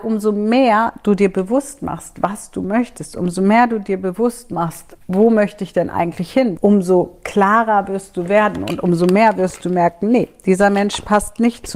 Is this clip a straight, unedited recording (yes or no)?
no